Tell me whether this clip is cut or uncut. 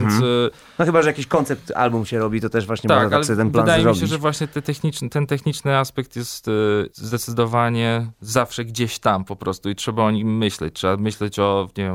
cut